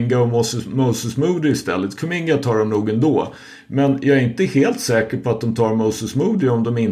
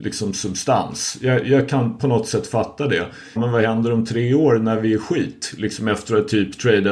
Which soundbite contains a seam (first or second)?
second